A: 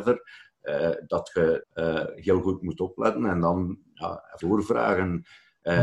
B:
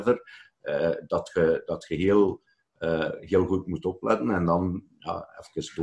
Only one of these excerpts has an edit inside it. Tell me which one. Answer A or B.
A